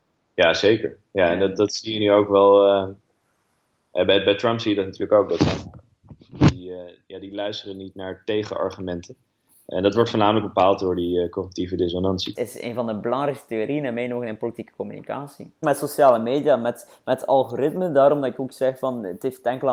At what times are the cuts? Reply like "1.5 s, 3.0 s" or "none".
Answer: 12.3 s, 15.6 s